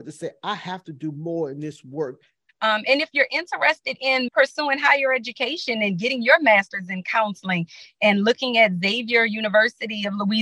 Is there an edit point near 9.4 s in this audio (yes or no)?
no